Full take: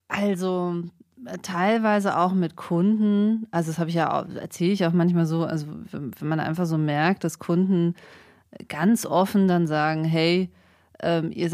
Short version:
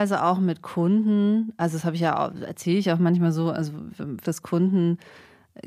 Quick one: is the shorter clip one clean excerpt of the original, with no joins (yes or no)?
no